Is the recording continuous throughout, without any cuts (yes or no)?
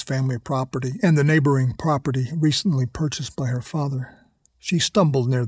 no